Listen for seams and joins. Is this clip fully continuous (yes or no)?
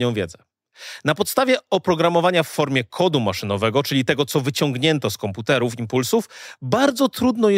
yes